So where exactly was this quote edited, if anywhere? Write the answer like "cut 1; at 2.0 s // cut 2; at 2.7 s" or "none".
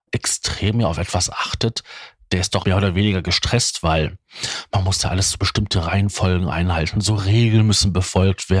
cut 1; at 2.6 s